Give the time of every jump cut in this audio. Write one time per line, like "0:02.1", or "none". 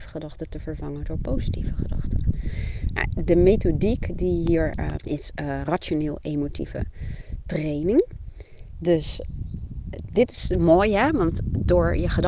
0:05.0
0:08.7